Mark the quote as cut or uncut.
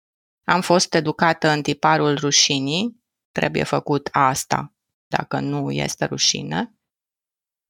uncut